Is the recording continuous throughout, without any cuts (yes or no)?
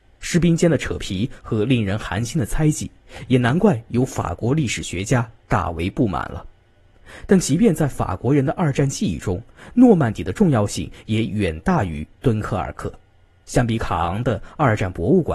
yes